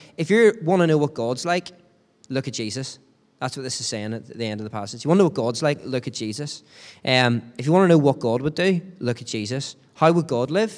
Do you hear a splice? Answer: no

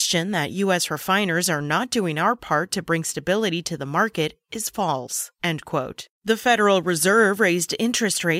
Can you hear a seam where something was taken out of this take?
yes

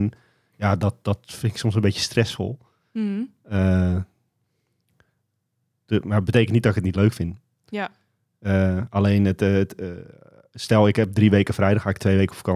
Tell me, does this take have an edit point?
no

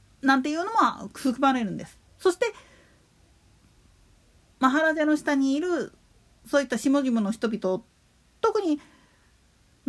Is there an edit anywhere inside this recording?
no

